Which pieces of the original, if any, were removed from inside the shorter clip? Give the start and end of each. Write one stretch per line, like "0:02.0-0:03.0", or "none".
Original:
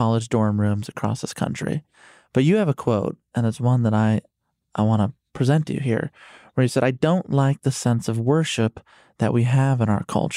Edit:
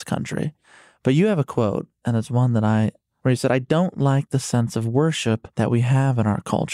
0:04.5-0:06.5
0:08.8-0:09.1